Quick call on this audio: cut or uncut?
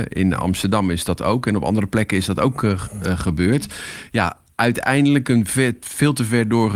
uncut